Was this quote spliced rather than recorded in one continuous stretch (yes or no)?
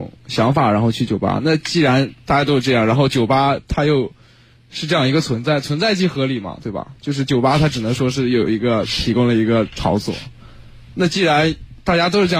no